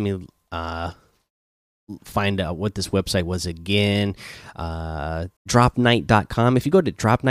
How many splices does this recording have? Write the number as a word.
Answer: one